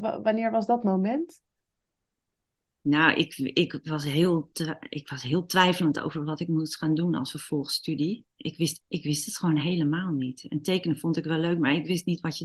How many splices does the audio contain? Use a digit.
1